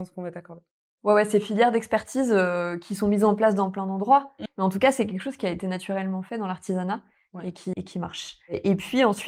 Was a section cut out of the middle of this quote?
yes; 2 cuts; at 4.5 s, 7.7 s

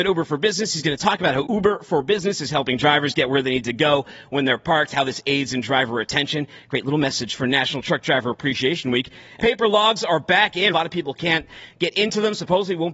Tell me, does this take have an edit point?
yes; 3 cuts; at 1.4 s, 9.4 s, 10.7 s

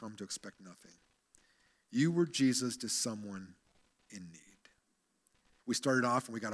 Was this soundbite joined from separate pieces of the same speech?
yes; 1 cut; at 5.6 s

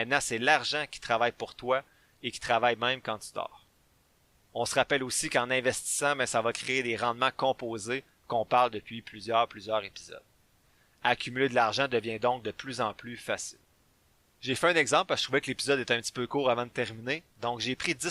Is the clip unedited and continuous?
yes; 0 cuts

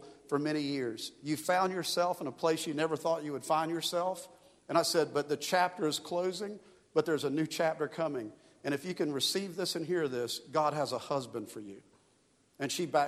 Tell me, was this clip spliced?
no; 0 cuts

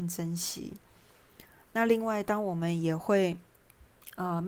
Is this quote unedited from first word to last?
no; 1 cut; at 1.7 s

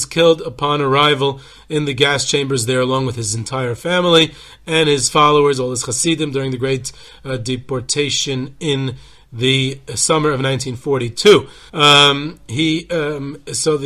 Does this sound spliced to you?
yes; 1 cut; at 11.7 s

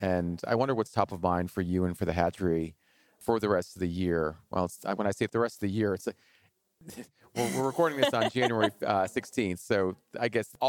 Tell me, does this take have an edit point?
no; 0 cuts

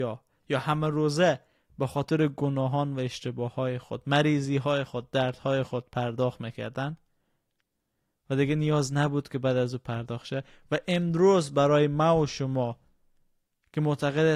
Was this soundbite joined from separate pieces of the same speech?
no; 0 cuts

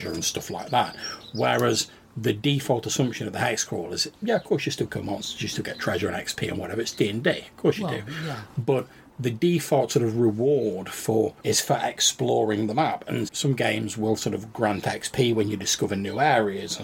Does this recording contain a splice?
yes; 1 cut; at 13.3 s

